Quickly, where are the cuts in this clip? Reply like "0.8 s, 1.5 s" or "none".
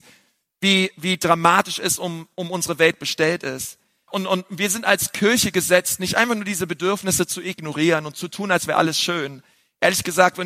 4.1 s